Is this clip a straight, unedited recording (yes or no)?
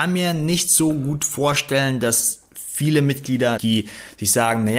no